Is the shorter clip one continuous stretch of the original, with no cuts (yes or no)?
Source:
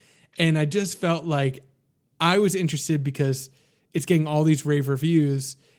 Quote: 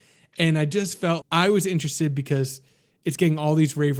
no